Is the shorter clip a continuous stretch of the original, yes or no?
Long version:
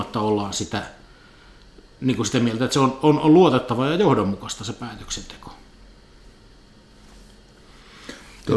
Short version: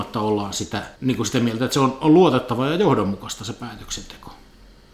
no